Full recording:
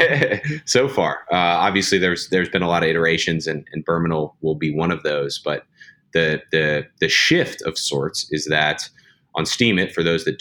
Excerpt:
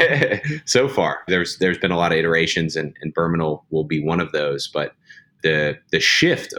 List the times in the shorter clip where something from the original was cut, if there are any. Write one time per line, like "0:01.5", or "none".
0:01.3
0:05.4